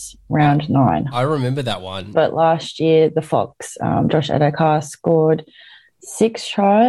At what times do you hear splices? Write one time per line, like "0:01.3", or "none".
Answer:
0:02.1